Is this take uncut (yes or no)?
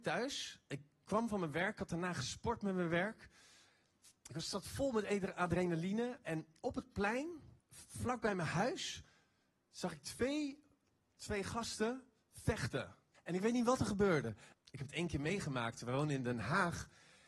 no